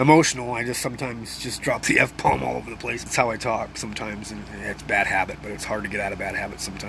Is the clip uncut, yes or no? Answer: no